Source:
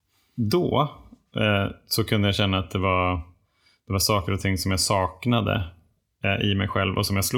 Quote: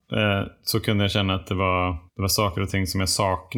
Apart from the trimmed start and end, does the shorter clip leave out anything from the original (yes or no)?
yes